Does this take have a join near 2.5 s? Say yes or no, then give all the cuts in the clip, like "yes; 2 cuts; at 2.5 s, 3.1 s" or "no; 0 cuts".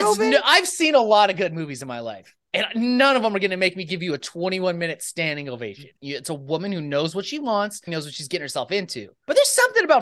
no; 2 cuts; at 6.0 s, 7.9 s